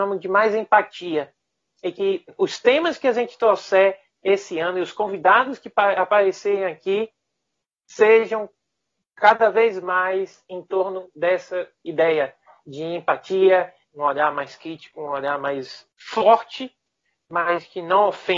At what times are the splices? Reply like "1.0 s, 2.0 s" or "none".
13.9 s, 15.9 s